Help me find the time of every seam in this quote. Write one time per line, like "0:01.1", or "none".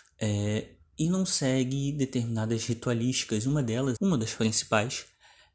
0:04.0